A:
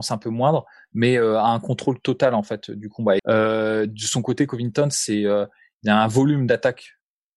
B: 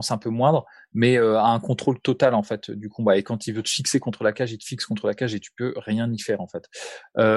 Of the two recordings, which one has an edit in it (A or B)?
A